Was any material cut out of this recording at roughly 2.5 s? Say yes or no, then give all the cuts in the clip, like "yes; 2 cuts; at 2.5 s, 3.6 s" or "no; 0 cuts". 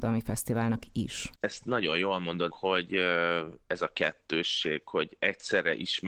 yes; 2 cuts; at 1.4 s, 2.5 s